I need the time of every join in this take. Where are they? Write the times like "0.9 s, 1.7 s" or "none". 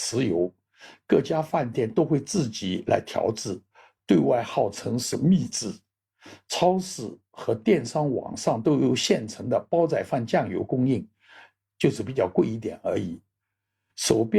none

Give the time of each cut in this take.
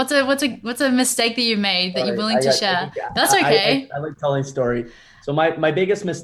none

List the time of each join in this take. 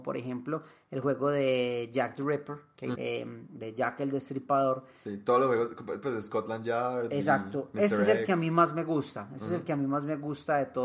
2.9 s

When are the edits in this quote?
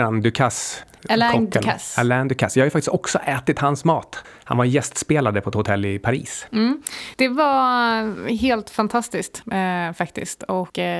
none

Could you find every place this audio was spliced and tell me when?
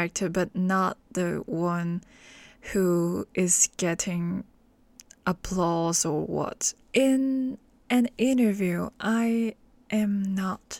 6.8 s

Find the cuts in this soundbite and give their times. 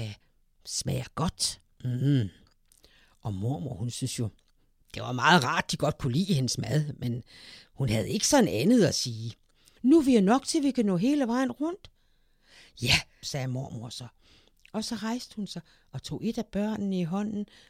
9.8 s, 13.2 s

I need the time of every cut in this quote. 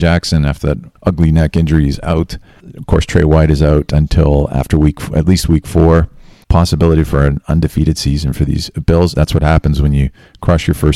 6.4 s, 9.1 s

